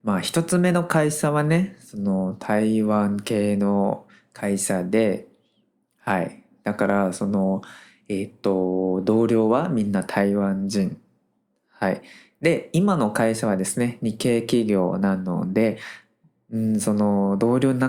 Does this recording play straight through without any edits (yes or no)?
yes